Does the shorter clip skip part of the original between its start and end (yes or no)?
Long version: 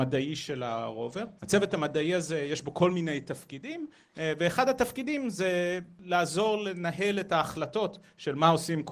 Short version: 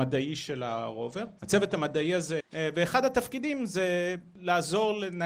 yes